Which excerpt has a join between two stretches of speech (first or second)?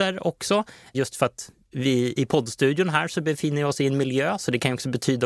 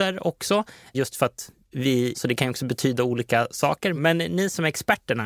second